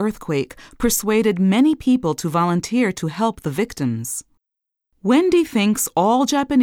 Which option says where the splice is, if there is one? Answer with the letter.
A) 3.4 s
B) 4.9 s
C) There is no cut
B